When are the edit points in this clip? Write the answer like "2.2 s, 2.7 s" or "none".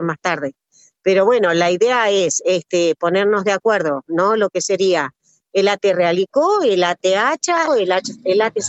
7.7 s